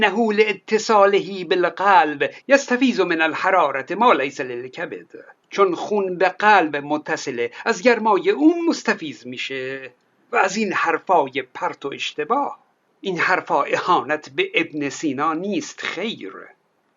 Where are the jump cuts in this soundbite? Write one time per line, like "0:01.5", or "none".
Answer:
none